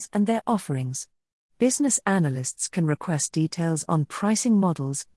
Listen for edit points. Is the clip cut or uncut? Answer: cut